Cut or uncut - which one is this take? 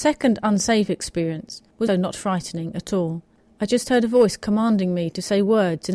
cut